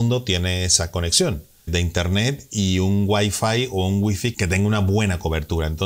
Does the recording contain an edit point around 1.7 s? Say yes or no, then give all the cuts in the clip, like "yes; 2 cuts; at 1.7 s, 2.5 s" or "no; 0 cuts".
yes; 1 cut; at 1.7 s